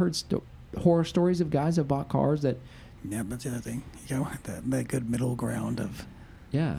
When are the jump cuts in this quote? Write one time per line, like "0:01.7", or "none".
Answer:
0:03.0